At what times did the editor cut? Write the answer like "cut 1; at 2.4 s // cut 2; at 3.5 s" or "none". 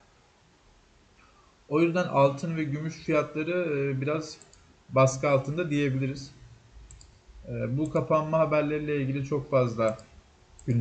none